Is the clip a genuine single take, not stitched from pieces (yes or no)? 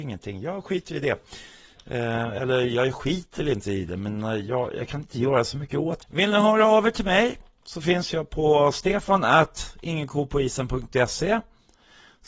no